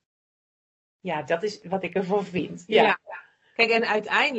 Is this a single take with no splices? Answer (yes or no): yes